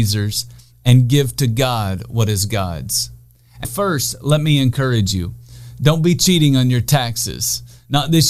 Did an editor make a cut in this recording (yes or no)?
yes